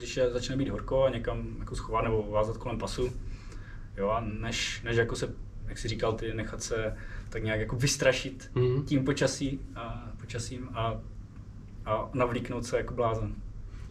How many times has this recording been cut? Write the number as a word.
zero